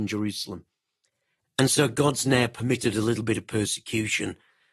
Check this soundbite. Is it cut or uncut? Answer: cut